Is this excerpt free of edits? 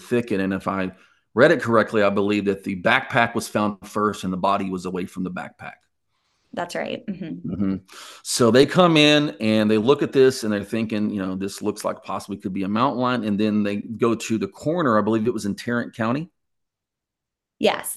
yes; 0 cuts

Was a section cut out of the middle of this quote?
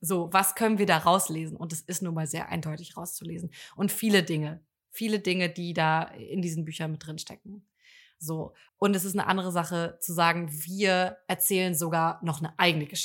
yes; 1 cut; at 8.7 s

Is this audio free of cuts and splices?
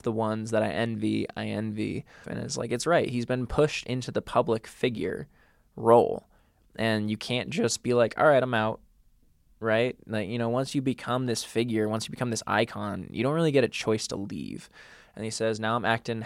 no; 1 cut; at 2.2 s

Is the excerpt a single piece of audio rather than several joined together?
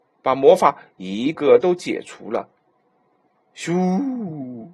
no; 1 cut; at 1.3 s

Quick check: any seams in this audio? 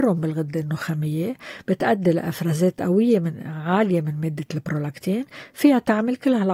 no; 0 cuts

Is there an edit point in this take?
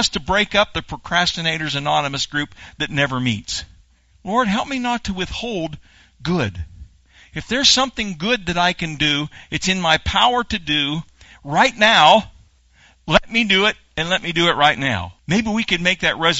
yes; 2 cuts; at 4.1 s, 15.2 s

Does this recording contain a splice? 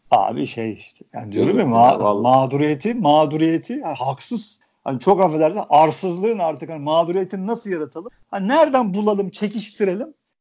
no; 0 cuts

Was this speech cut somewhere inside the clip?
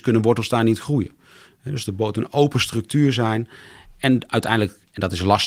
no; 0 cuts

